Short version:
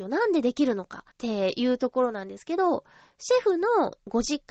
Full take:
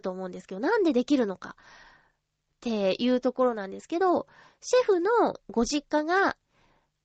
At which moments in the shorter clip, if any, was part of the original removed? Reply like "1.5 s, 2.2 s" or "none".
1.1 s